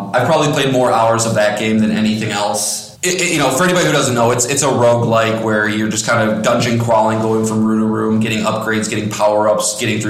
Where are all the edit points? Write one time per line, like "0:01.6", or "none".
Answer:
0:02.9